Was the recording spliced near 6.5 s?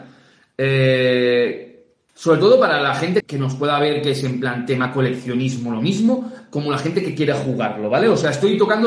no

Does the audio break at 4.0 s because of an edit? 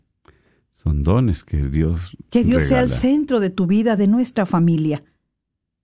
yes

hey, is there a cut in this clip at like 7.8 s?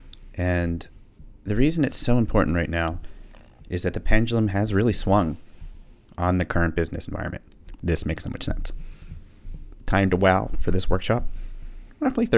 yes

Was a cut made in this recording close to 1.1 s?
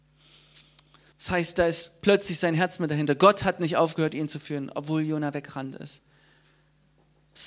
yes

